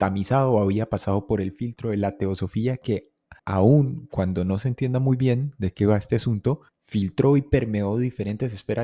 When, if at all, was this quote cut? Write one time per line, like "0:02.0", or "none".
0:03.4
0:06.7